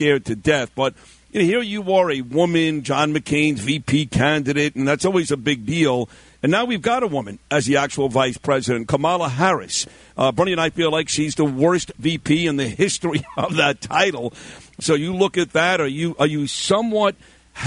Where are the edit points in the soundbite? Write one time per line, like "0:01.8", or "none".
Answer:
0:14.8